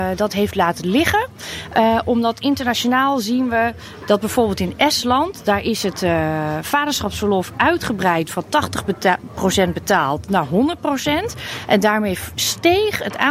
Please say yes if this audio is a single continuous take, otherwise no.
yes